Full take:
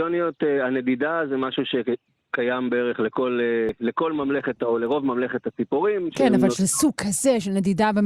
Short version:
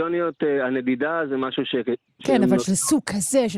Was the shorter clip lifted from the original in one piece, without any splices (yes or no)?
no